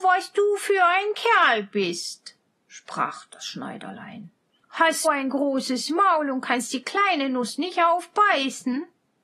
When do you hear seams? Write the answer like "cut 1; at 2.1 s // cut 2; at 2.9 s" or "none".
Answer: cut 1; at 5.0 s

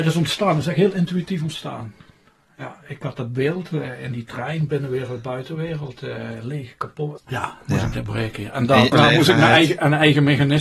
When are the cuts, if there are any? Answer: cut 1; at 7.2 s // cut 2; at 8.9 s

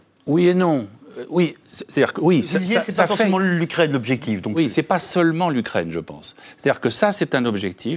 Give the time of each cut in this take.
none

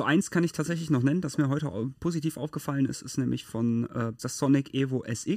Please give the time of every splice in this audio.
cut 1; at 4.2 s

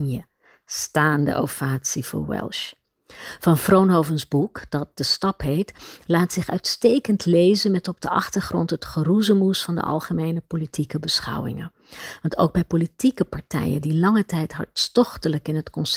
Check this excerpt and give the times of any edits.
none

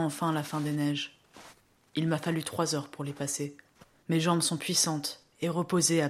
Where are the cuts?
cut 1; at 4.0 s

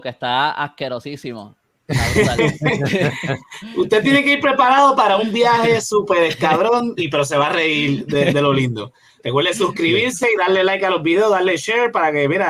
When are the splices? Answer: none

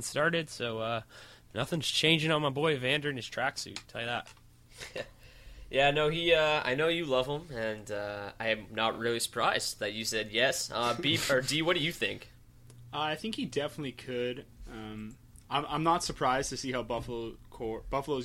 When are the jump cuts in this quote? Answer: none

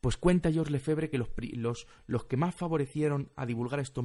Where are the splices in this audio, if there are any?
none

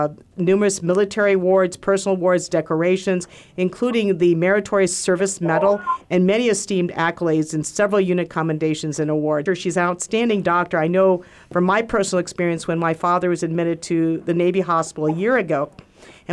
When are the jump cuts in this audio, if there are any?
cut 1; at 9.5 s

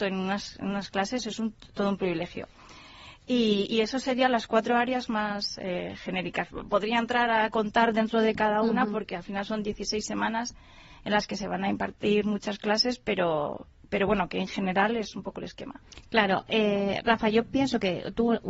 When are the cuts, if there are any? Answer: none

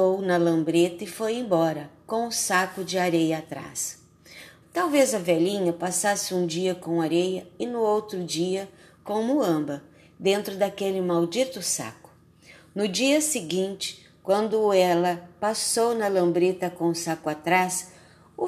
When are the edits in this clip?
cut 1; at 4.6 s

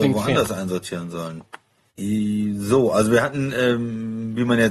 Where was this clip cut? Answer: cut 1; at 1.9 s

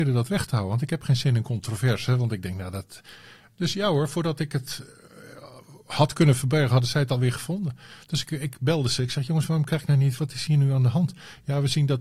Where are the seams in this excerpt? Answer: none

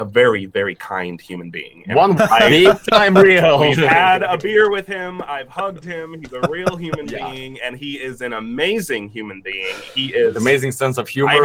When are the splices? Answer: cut 1; at 2.2 s

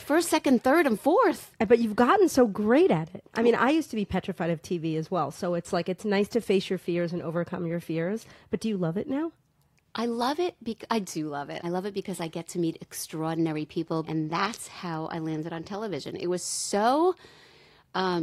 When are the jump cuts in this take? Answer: cut 1; at 11.6 s // cut 2; at 14.0 s

